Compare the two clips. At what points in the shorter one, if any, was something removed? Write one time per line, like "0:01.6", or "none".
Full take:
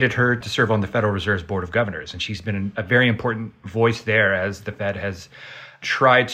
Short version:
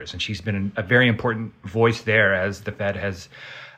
none